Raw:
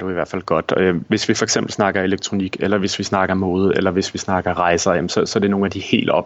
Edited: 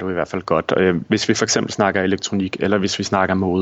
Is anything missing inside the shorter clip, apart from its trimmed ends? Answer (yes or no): no